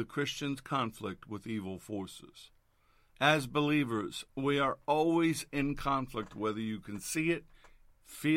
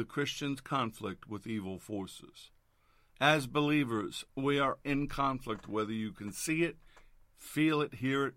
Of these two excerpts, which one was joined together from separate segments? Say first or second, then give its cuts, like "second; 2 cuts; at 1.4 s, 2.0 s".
second; 1 cut; at 4.8 s